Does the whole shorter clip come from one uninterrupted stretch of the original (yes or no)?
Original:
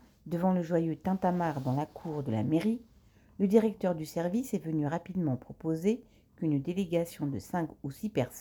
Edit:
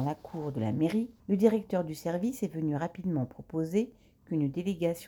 no